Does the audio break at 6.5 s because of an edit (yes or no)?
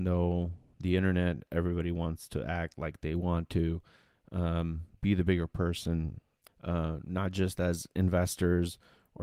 yes